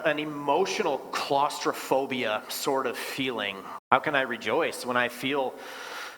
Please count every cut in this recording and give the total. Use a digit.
1